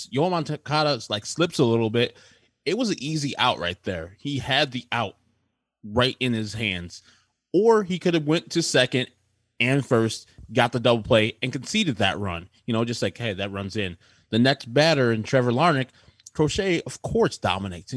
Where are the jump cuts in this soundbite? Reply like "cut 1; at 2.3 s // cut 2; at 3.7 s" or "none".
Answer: none

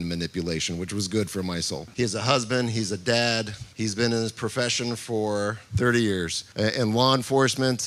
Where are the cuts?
cut 1; at 1.9 s

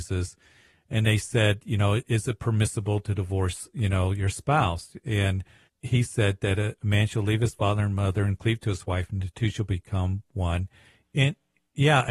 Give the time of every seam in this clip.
cut 1; at 5.7 s // cut 2; at 11.0 s

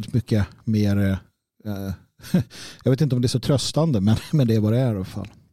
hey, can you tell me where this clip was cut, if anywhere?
none

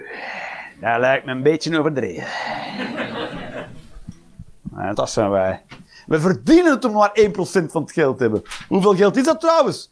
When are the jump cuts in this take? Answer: cut 1; at 4.9 s

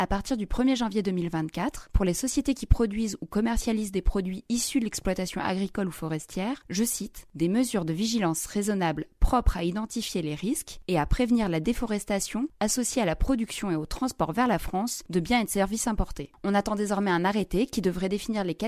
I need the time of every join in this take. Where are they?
cut 1; at 6.6 s

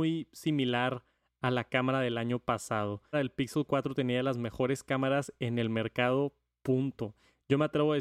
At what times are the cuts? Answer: cut 1; at 3.1 s

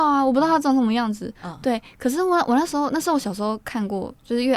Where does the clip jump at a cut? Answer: none

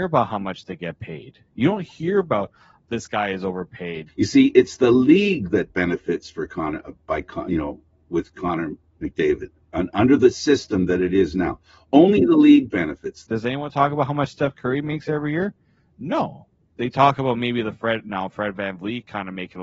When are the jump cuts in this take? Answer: cut 1; at 4.1 s // cut 2; at 13.3 s

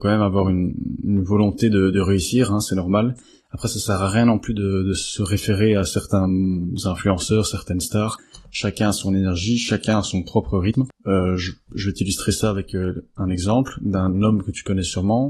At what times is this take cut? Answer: none

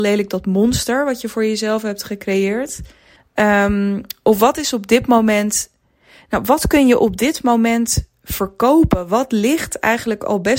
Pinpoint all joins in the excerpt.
cut 1; at 3.2 s

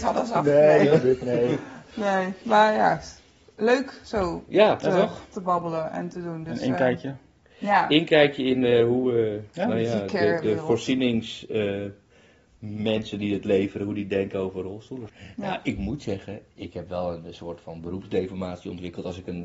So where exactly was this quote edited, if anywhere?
none

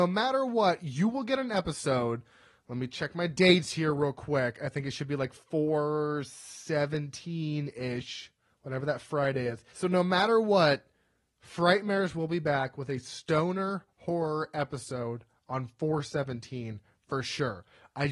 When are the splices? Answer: cut 1; at 9.7 s

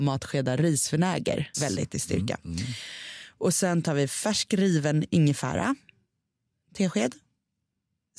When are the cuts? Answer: cut 1; at 1.5 s

